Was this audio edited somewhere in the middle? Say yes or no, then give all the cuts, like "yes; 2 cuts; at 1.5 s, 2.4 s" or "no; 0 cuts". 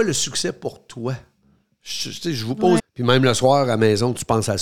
yes; 1 cut; at 2.8 s